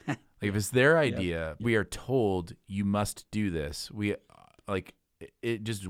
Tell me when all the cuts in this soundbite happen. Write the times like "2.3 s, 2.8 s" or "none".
1.6 s